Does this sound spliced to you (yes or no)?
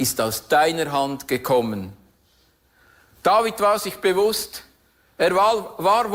no